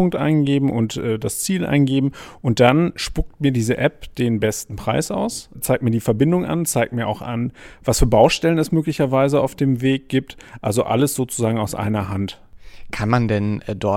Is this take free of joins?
yes; 0 cuts

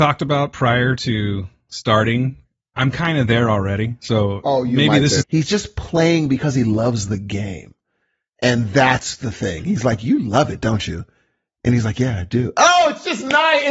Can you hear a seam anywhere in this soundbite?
yes; 1 cut; at 5.2 s

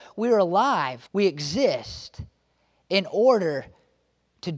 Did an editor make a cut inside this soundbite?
yes; 1 cut; at 1.1 s

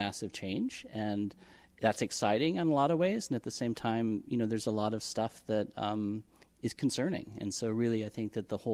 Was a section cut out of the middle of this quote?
no; 0 cuts

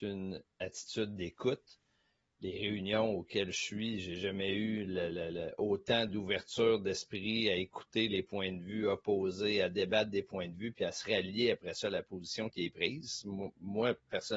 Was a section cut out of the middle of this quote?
no; 0 cuts

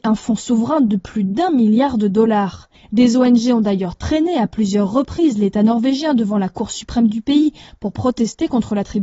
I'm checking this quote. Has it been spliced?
no; 0 cuts

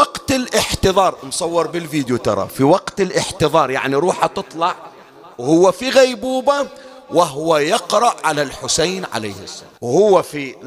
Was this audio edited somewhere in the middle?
yes; 1 cut; at 9.8 s

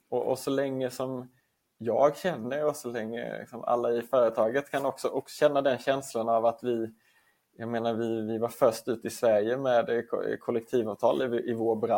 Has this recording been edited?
no; 0 cuts

